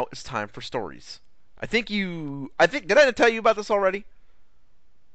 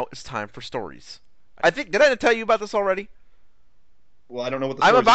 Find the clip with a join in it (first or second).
second